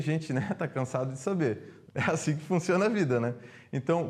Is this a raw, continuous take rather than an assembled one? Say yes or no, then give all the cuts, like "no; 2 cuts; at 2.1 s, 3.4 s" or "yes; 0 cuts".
no; 1 cut; at 1.9 s